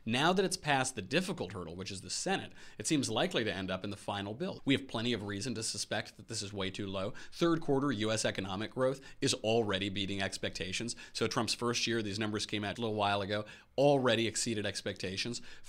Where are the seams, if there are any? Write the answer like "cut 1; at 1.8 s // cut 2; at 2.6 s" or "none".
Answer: cut 1; at 4.6 s // cut 2; at 12.8 s